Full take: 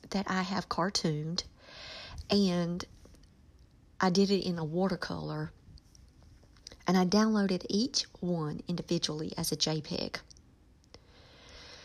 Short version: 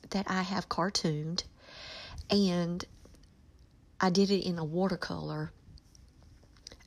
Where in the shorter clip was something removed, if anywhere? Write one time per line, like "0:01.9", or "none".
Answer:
none